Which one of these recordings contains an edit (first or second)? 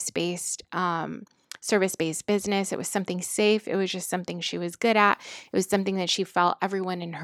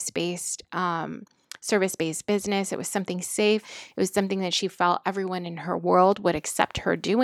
second